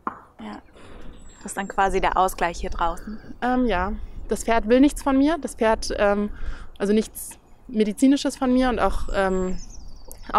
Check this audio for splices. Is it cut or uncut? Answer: uncut